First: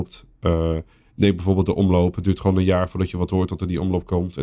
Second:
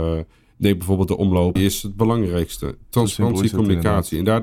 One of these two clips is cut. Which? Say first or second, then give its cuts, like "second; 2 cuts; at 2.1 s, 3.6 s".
second; 1 cut; at 1.6 s